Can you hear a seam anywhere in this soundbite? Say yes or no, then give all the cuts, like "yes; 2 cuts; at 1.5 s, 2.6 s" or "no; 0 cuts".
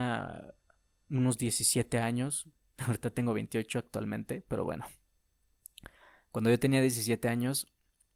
no; 0 cuts